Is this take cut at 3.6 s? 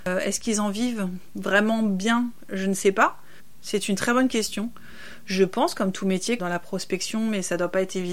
no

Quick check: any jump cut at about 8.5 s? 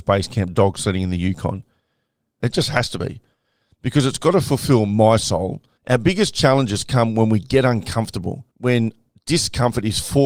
yes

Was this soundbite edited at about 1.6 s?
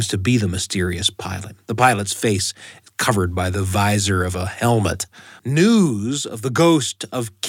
no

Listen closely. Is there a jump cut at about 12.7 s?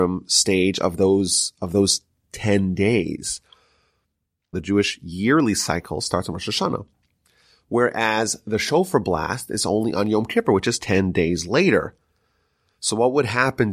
no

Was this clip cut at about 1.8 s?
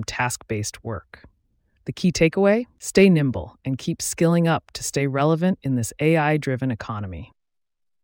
no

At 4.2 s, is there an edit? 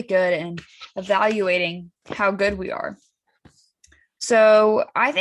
yes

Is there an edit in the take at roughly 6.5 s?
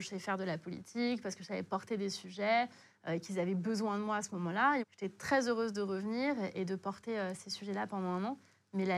yes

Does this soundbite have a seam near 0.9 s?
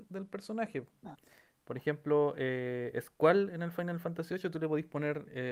no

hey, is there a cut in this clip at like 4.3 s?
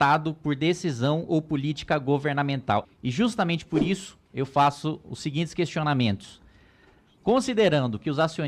no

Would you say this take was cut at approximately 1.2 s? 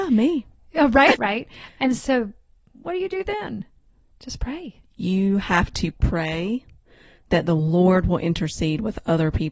yes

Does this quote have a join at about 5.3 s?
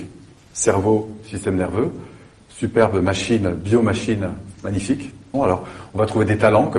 yes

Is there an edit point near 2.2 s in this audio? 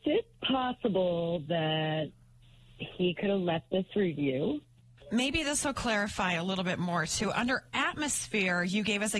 no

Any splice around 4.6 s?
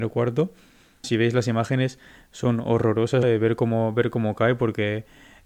no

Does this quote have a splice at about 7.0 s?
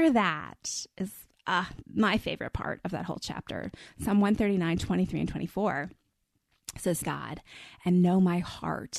yes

